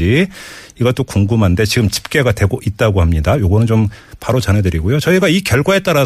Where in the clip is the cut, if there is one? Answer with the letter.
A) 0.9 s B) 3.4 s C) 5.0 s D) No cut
D